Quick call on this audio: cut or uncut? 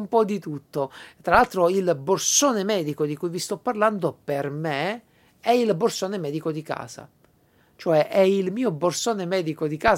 uncut